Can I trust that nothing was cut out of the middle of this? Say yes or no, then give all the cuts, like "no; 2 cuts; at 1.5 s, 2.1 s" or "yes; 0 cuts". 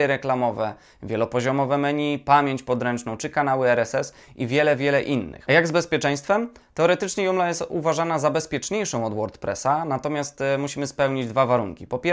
yes; 0 cuts